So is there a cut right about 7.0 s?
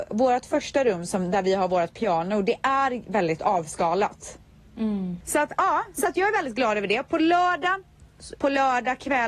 no; 2 cuts; at 5.2 s, 8.4 s

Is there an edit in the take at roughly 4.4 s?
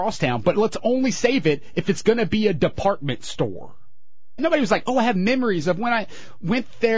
yes; 1 cut; at 4.4 s

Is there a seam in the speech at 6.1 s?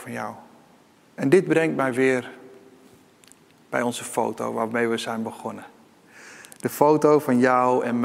no; 1 cut; at 1.0 s

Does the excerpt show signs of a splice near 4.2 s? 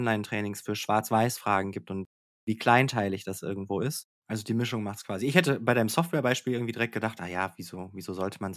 yes; 1 cut; at 4.2 s

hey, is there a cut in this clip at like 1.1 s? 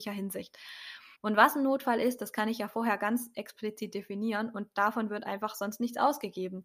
yes; 1 cut; at 1.1 s

